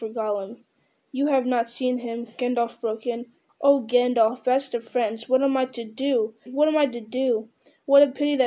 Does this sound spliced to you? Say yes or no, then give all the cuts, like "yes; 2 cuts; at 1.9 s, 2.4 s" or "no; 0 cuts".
yes; 2 cuts; at 3.5 s, 6.5 s